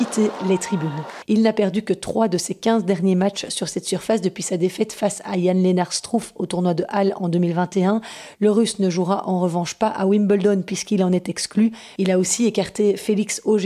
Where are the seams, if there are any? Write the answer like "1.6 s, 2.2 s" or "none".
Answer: 1.2 s, 12.0 s